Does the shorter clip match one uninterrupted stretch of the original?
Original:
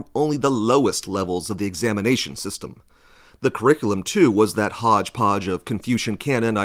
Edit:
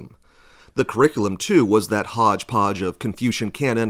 yes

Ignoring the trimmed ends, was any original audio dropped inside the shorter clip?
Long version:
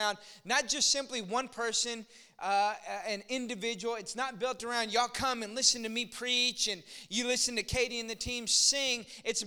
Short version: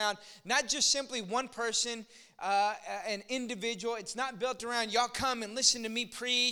no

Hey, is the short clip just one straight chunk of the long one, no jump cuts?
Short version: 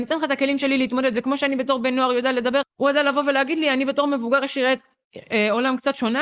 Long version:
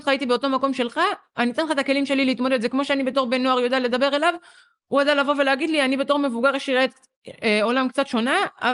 no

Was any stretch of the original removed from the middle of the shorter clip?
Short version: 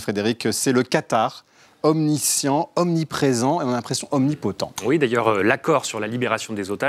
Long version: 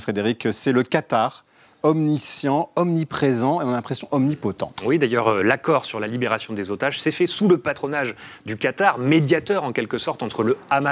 no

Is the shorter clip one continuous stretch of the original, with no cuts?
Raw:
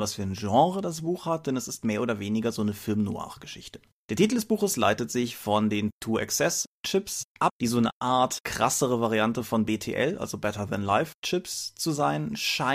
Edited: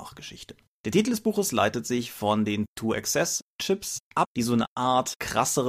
yes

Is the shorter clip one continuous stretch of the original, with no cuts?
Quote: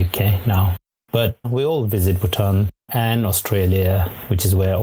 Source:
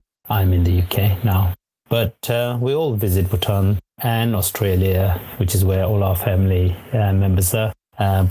no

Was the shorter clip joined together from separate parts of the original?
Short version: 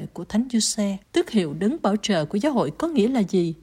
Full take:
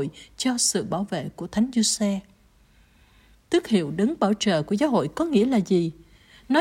yes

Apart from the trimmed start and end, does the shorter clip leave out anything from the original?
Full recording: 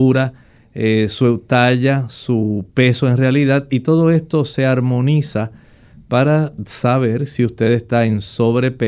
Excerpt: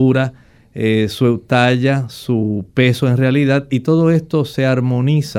no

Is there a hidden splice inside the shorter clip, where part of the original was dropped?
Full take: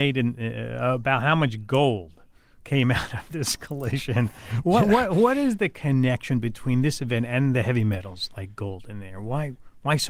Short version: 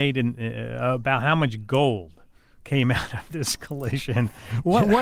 no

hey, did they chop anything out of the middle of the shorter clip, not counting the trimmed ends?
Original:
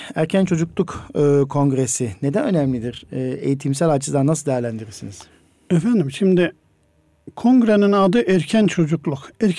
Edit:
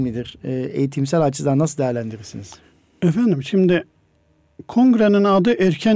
no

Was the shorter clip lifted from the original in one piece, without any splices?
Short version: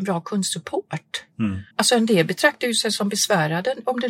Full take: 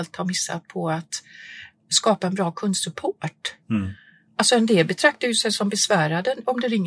no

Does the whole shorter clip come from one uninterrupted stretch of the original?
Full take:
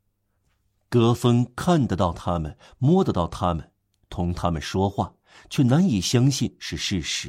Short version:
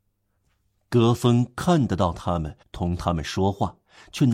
no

